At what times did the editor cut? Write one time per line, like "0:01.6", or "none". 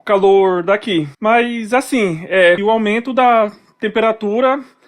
0:01.1
0:02.6